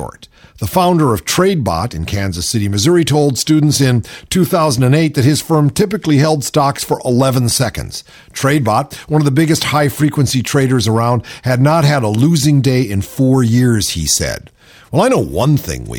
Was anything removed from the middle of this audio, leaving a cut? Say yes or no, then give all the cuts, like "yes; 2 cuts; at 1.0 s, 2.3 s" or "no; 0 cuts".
no; 0 cuts